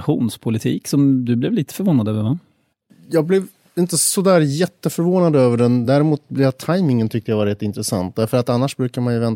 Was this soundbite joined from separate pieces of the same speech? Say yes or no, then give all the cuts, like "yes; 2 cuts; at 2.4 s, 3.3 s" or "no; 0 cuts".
no; 0 cuts